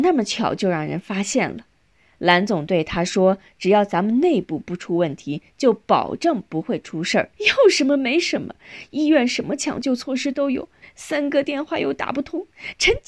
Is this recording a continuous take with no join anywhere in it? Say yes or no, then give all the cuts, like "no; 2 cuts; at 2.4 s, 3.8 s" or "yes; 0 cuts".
no; 2 cuts; at 7.3 s, 10.8 s